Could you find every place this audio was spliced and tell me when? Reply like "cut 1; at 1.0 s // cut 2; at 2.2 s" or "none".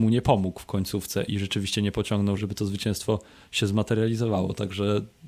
cut 1; at 1.3 s // cut 2; at 2.4 s